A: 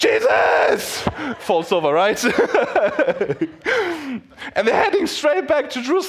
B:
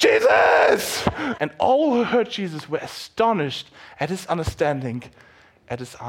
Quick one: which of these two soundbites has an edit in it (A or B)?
B